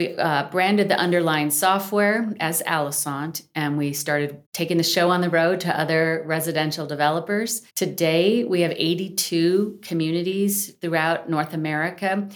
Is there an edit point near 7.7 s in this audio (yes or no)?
yes